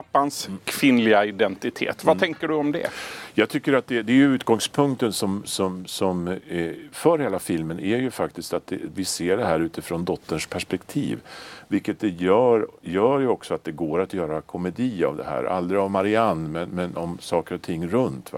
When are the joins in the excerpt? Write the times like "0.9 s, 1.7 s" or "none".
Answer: 5.4 s